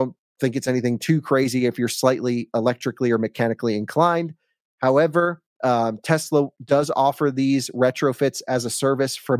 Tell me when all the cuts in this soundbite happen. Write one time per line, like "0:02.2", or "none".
none